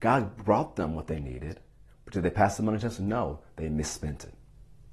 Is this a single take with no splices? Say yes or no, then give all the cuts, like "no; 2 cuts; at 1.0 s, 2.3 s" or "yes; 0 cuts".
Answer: yes; 0 cuts